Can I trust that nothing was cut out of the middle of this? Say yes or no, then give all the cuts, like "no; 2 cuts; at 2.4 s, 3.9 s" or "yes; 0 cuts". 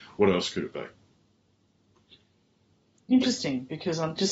yes; 0 cuts